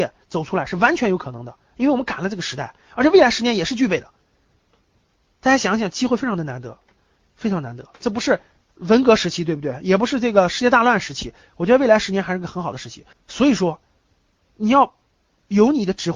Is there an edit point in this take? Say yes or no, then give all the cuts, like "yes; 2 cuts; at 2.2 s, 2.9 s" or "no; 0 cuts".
yes; 1 cut; at 13.1 s